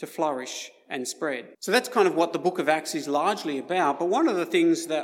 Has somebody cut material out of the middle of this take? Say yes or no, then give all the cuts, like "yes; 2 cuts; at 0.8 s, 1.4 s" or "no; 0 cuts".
yes; 1 cut; at 1.5 s